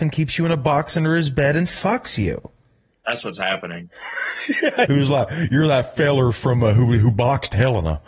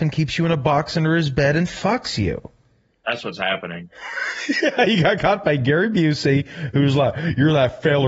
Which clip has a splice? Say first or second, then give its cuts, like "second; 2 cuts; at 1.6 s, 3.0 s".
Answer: first; 1 cut; at 4.9 s